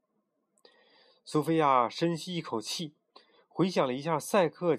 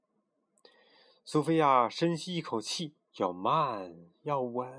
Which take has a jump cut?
second; 1 cut; at 3.1 s

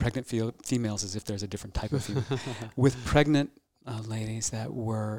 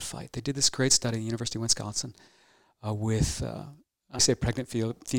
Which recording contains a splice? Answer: second; 1 cut; at 4.2 s

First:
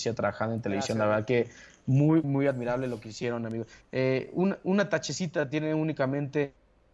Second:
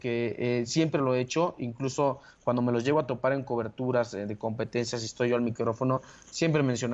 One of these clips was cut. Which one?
first; 2 cuts; at 2.2 s, 3.8 s

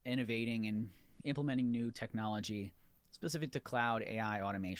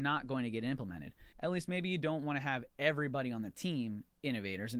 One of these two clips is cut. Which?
second; 1 cut; at 1.3 s

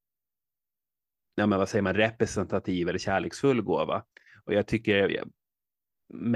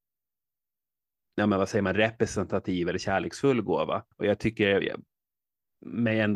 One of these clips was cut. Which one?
second; 1 cut; at 4.1 s

